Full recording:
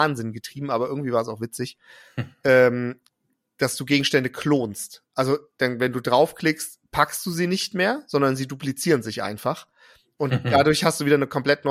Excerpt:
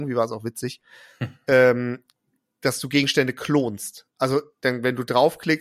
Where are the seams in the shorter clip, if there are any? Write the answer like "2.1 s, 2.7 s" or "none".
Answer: none